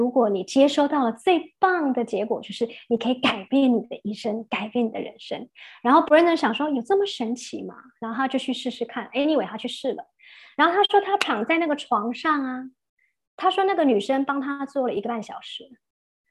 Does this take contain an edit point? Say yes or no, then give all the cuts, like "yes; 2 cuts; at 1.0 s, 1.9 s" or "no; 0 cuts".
no; 0 cuts